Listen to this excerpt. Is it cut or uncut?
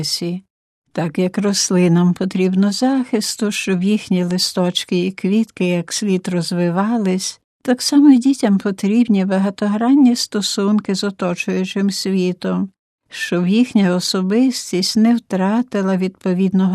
uncut